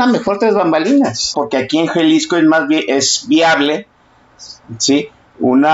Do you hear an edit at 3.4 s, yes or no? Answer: no